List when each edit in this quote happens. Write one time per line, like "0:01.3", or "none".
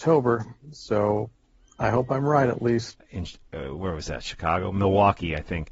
0:02.9

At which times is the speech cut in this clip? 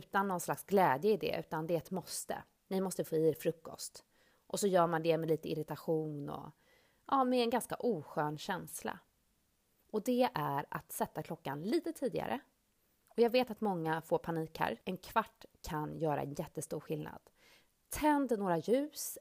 0:09.8
0:14.8

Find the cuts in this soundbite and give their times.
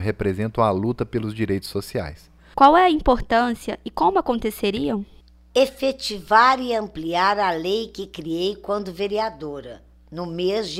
0:02.5

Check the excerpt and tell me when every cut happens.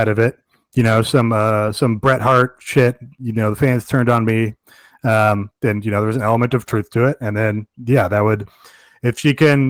none

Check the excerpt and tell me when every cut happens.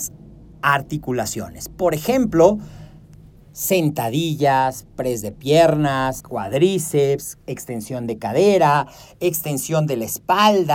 0:06.2

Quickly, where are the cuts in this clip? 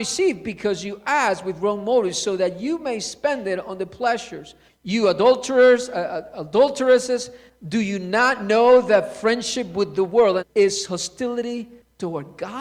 0:10.4

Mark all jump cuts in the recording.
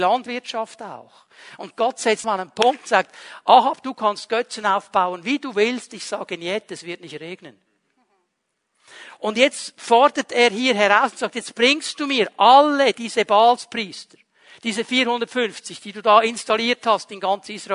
0:02.2

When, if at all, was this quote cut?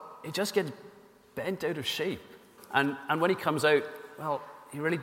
0:02.6

